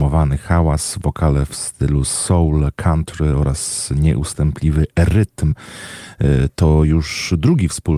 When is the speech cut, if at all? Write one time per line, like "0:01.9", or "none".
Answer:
0:05.5